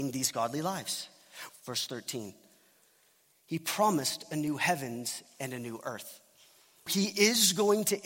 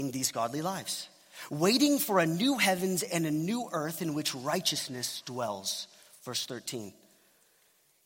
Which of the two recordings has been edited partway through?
first; 2 cuts; at 1.5 s, 6.9 s

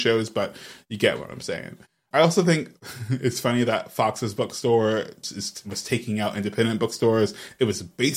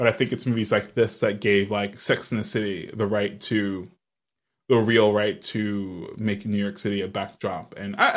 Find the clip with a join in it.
first; 1 cut; at 5.2 s

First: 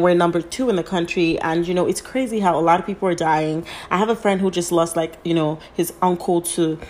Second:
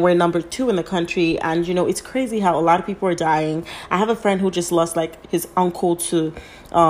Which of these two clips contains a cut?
second; 1 cut; at 5.2 s

